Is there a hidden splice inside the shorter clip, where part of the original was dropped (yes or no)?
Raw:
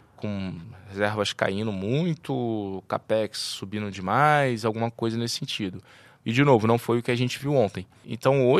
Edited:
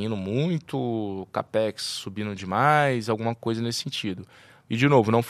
no